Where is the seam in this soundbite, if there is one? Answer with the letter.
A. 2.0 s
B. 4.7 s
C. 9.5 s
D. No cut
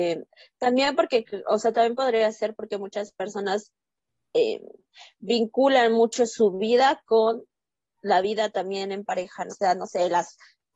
C